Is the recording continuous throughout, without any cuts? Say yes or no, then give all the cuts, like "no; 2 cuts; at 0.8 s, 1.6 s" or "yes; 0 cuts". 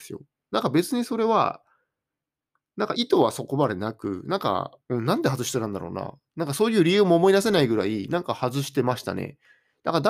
no; 2 cuts; at 2.9 s, 4.8 s